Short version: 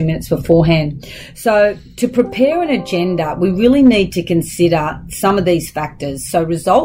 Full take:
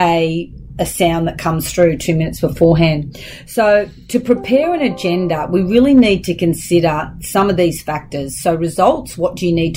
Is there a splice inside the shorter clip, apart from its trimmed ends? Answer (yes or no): no